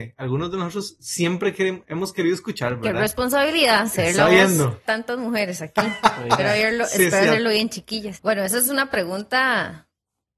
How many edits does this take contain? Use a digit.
2